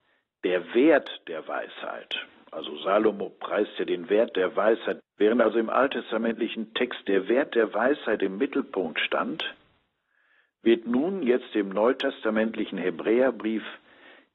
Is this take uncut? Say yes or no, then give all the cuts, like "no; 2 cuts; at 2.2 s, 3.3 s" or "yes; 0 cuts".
no; 1 cut; at 5.0 s